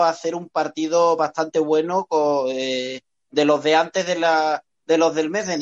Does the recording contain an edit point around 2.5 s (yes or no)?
no